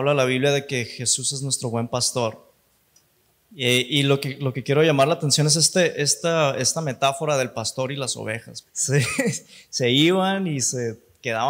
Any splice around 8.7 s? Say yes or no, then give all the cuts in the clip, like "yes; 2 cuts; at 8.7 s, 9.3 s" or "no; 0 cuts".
yes; 1 cut; at 8.7 s